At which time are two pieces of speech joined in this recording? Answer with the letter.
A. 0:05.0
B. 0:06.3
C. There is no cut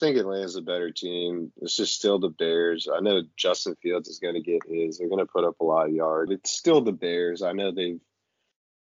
B